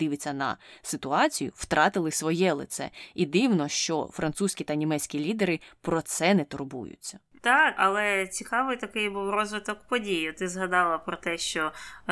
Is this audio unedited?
no; 1 cut; at 7.8 s

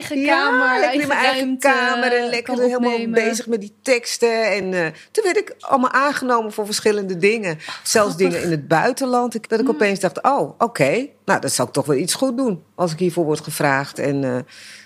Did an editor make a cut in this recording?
no; 0 cuts

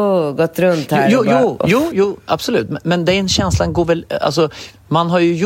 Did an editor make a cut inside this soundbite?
yes; 1 cut; at 1.9 s

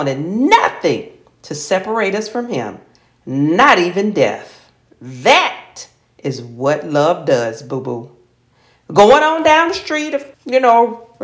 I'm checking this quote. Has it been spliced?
yes; 1 cut; at 10.3 s

